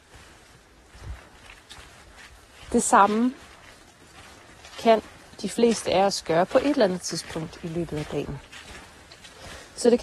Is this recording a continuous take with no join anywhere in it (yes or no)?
yes